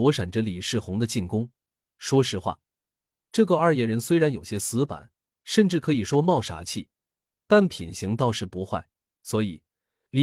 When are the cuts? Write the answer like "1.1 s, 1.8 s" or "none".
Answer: 9.1 s

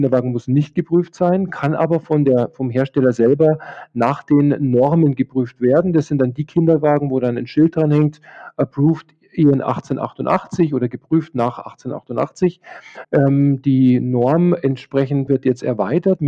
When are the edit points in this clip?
13.0 s, 15.3 s

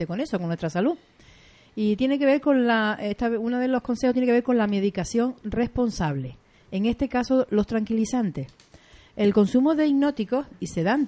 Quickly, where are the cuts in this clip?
none

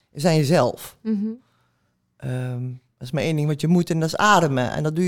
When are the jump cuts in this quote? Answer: none

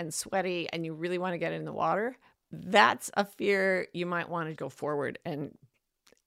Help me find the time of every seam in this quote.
2.4 s, 4.6 s

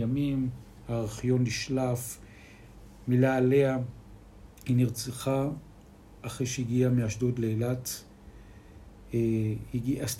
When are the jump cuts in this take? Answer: none

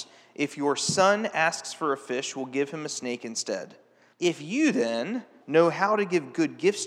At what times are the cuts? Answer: 4.1 s, 5.4 s

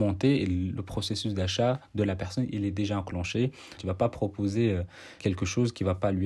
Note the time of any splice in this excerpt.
3.8 s, 5.2 s

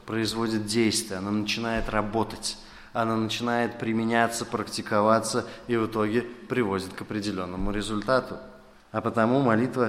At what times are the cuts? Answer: 8.8 s

